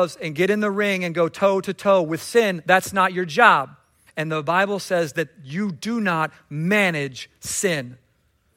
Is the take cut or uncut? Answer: cut